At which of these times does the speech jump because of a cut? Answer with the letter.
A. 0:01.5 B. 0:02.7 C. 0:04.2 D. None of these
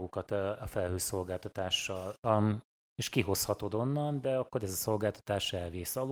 B